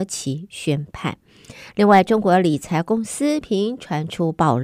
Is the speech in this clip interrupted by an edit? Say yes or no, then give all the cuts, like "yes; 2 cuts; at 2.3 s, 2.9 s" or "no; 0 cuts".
yes; 1 cut; at 3.4 s